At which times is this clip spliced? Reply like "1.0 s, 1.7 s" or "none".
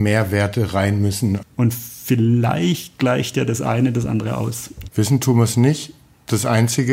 1.4 s, 4.9 s